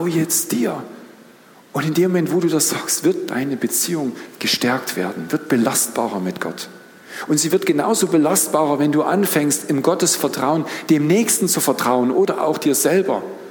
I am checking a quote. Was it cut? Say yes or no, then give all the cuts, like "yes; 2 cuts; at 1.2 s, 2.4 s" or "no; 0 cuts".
no; 0 cuts